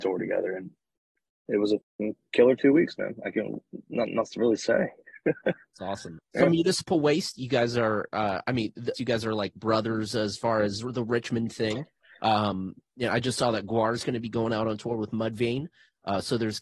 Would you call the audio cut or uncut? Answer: cut